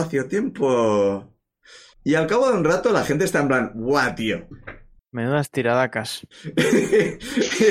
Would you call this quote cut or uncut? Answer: cut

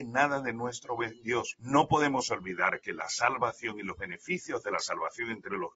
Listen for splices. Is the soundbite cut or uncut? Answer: cut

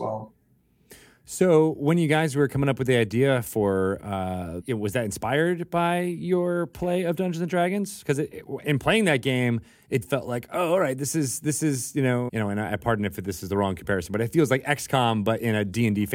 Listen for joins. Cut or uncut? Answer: cut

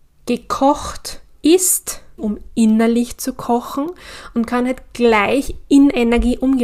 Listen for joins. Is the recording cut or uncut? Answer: cut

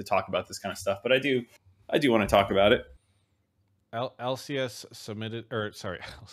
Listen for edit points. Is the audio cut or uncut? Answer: cut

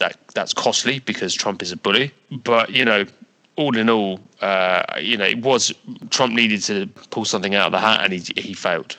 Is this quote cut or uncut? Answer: uncut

